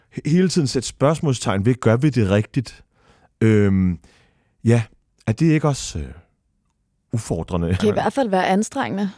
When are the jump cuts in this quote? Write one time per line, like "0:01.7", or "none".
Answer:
0:07.8

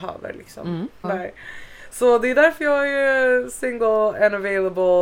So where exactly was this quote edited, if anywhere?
0:01.0

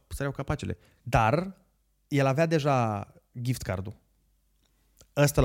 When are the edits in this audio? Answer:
0:01.0

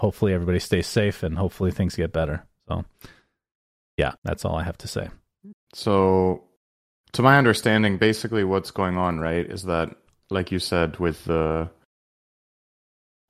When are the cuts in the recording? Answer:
0:04.2
0:05.5

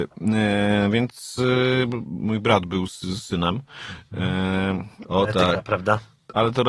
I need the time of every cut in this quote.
0:05.0

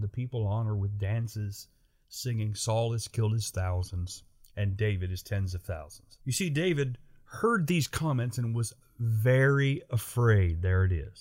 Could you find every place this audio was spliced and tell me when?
0:06.2

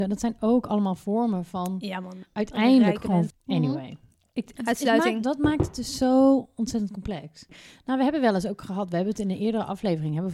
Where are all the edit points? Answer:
0:03.3

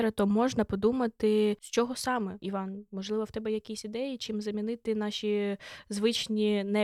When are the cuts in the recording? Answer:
none

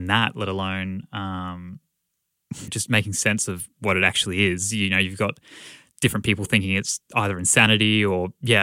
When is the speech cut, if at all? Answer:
0:02.7

